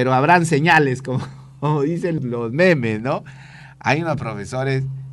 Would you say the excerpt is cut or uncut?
cut